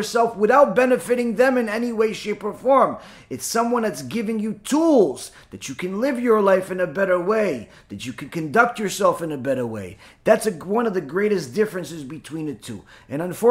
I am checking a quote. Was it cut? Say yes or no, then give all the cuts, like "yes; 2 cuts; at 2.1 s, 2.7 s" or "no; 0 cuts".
no; 0 cuts